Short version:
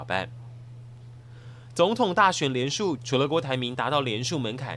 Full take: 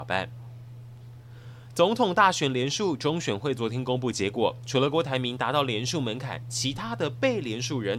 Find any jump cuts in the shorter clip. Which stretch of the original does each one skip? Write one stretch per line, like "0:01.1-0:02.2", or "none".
0:03.0-0:04.6